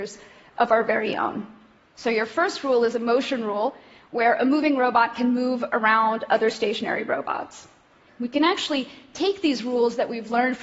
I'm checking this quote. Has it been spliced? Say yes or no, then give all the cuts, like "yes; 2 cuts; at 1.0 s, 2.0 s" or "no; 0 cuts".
yes; 2 cuts; at 1.8 s, 8.1 s